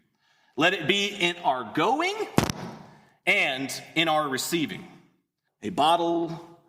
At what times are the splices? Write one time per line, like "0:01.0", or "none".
0:05.5